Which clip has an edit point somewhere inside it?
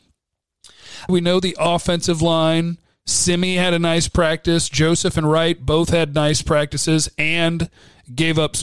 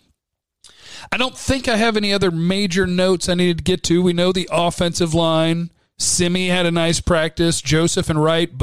first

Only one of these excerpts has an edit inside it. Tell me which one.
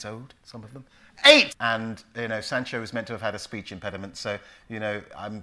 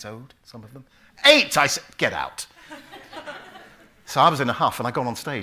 first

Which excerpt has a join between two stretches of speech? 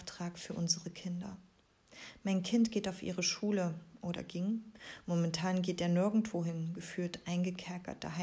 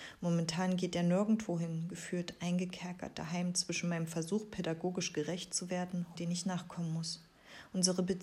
second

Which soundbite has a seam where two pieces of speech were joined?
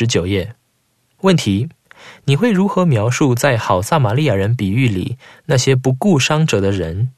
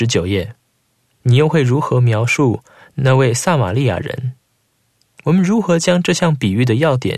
second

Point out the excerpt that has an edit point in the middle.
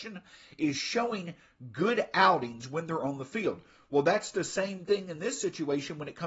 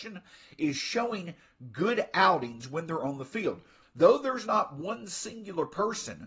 second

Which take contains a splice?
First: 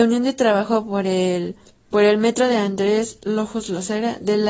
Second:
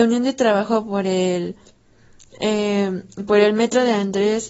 first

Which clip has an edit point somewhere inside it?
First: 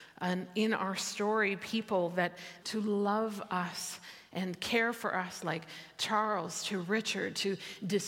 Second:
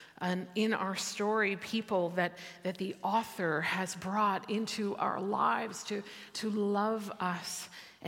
first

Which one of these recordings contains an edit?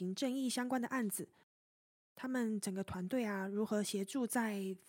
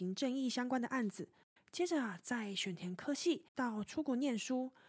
second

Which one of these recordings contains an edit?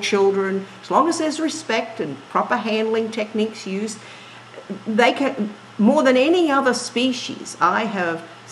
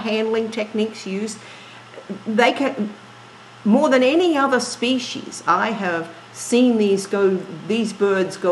first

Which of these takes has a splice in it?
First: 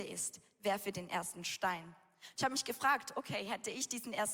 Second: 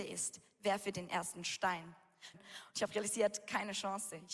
second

